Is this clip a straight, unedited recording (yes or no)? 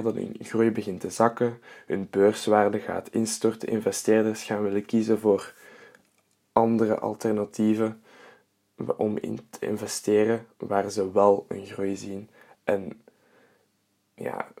yes